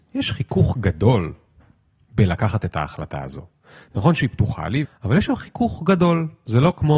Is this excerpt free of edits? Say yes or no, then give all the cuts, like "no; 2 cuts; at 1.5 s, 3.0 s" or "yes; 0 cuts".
no; 1 cut; at 4.8 s